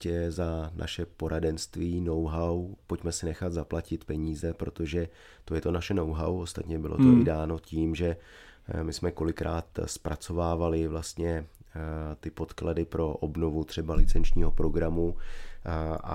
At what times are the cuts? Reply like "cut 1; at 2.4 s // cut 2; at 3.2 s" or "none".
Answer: cut 1; at 2.8 s

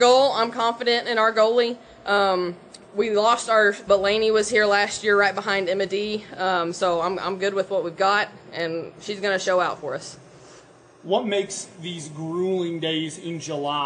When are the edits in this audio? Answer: cut 1; at 3.9 s

